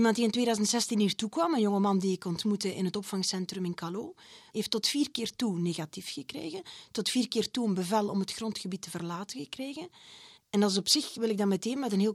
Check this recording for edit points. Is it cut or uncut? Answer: cut